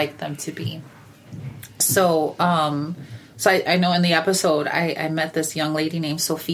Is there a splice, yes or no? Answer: yes